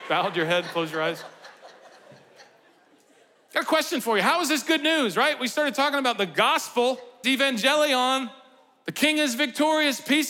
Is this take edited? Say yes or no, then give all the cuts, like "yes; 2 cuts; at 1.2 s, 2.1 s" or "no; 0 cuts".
yes; 1 cut; at 7.2 s